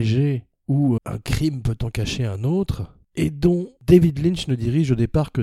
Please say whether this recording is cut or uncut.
cut